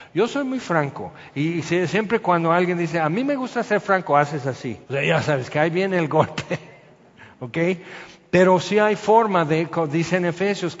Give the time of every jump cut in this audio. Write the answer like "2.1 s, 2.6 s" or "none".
4.8 s